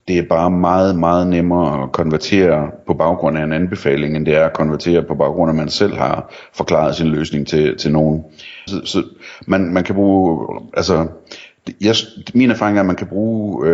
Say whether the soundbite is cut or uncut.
cut